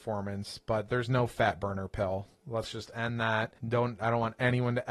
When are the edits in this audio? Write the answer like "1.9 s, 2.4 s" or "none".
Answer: 3.6 s

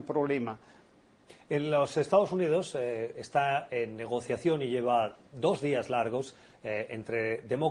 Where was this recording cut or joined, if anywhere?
none

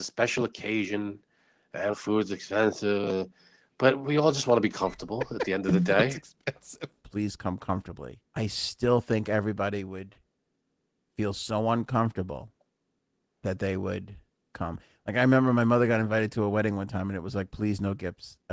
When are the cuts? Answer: 1.9 s, 7.0 s, 8.3 s

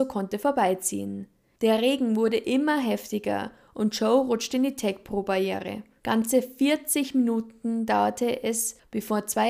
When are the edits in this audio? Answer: 6.0 s

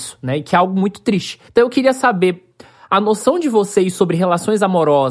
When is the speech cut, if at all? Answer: 1.5 s

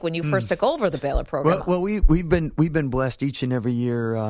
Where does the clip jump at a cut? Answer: none

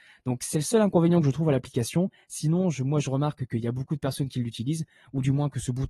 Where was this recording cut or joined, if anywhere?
none

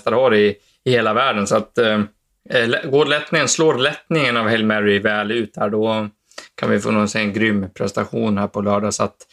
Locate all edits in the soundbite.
none

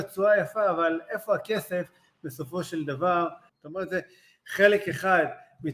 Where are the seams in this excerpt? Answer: 3.5 s

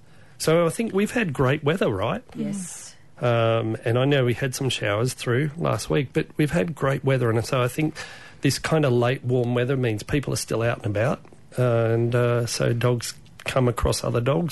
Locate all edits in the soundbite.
none

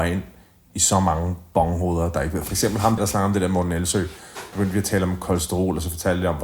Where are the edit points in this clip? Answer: 3.0 s, 4.5 s

